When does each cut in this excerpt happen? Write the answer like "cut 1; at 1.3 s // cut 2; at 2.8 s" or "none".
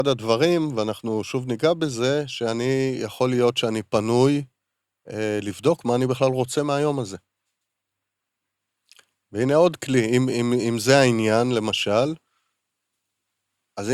none